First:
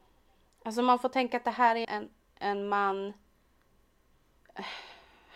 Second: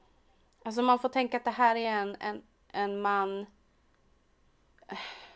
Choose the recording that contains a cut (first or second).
first